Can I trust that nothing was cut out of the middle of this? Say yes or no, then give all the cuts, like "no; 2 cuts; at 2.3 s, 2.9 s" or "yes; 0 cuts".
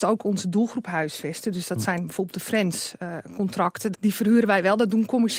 no; 1 cut; at 3.9 s